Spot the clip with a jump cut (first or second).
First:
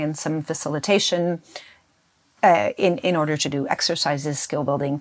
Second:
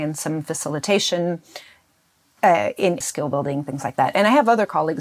second